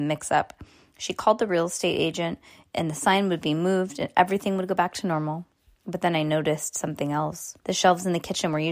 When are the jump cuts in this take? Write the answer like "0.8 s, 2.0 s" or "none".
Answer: 7.6 s